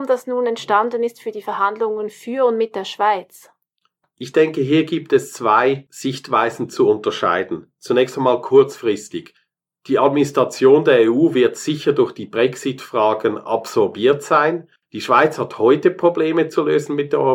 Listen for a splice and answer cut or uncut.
cut